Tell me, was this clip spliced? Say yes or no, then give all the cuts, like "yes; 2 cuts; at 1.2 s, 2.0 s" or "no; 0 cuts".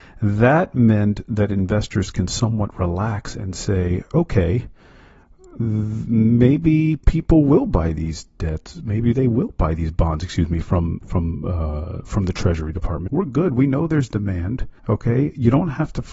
yes; 2 cuts; at 13.1 s, 14.8 s